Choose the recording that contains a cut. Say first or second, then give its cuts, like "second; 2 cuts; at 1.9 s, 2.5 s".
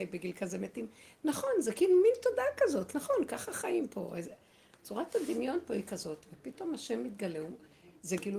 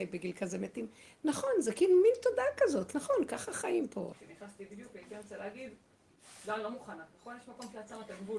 second; 1 cut; at 4.1 s